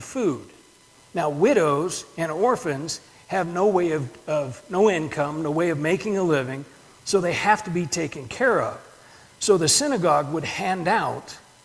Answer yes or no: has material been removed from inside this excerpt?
no